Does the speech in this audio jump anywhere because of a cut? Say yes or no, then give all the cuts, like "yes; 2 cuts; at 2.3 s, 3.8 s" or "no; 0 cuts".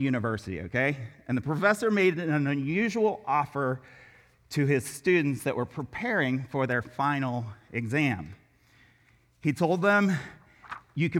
no; 0 cuts